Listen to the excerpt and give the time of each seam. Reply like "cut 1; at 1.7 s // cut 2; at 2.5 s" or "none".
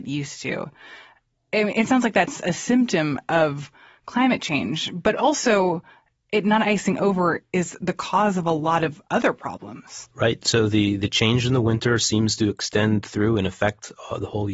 none